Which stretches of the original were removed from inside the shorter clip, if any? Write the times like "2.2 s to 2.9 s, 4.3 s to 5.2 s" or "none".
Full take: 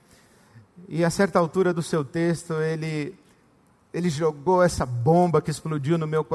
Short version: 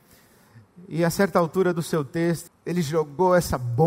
2.5 s to 3.8 s